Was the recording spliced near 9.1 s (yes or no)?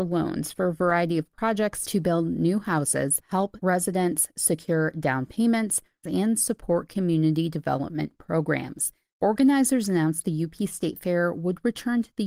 yes